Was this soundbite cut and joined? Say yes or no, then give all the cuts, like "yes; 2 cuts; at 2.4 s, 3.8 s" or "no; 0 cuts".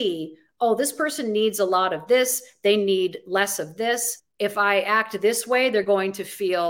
no; 0 cuts